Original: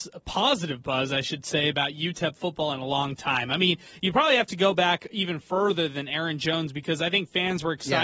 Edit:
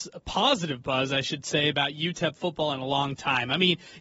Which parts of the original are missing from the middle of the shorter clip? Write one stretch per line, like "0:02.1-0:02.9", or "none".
none